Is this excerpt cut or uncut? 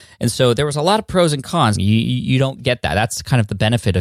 cut